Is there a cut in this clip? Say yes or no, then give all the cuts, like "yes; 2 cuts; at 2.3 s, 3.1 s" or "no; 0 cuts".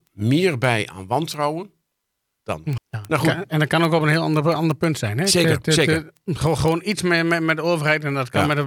yes; 1 cut; at 2.8 s